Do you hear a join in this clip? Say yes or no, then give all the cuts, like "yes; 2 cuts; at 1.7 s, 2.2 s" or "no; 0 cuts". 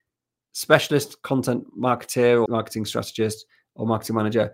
yes; 1 cut; at 2.5 s